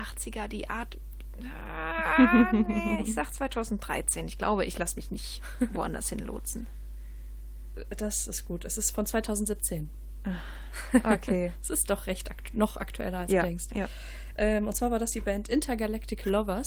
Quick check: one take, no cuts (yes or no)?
yes